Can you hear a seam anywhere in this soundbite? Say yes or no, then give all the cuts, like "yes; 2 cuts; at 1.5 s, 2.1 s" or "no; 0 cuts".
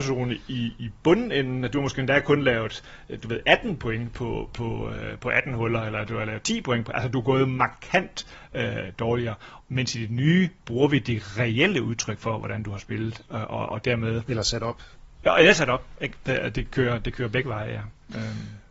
yes; 1 cut; at 9.6 s